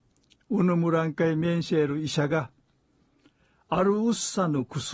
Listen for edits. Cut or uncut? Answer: uncut